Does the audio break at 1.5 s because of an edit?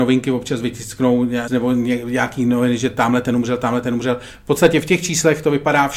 yes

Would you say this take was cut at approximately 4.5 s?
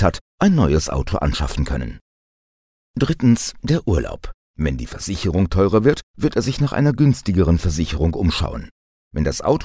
yes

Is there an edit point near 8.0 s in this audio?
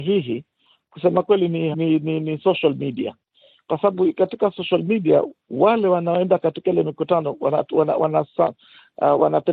no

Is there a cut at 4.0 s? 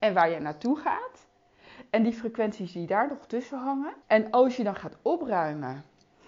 yes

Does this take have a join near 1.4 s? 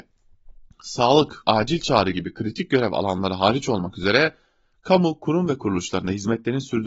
yes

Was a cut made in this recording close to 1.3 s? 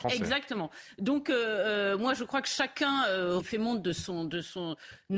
no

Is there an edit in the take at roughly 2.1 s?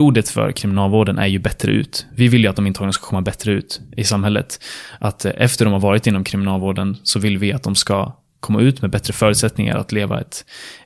no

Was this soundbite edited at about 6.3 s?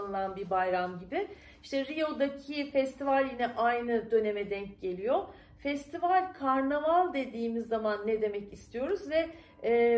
no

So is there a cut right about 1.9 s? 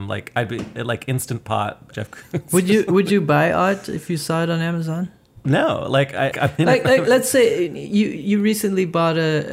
yes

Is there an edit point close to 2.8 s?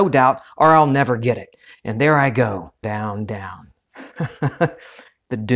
yes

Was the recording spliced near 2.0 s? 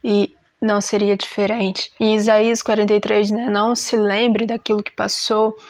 yes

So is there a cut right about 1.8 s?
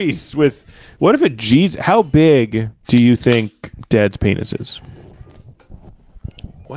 no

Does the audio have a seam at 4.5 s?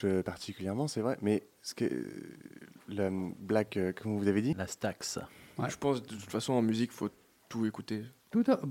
yes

